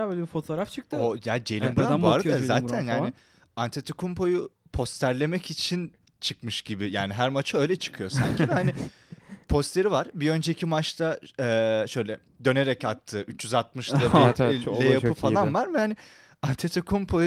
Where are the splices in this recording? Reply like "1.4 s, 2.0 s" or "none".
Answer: none